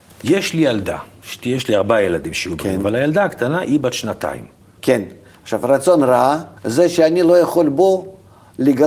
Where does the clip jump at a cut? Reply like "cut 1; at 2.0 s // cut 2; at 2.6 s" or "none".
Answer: cut 1; at 4.8 s // cut 2; at 6.6 s